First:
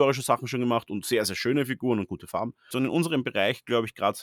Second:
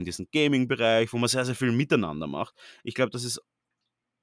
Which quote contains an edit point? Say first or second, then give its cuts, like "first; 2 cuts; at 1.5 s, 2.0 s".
first; 1 cut; at 2.7 s